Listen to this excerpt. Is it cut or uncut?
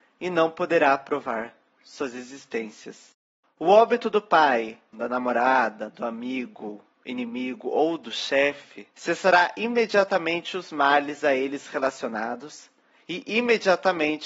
cut